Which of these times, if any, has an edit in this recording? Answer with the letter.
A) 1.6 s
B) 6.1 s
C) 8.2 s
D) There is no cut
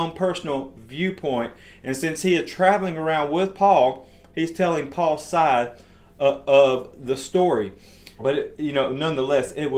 C